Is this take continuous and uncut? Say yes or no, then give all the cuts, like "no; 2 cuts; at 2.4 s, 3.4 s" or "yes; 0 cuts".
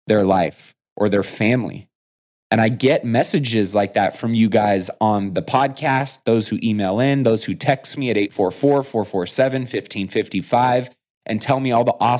yes; 0 cuts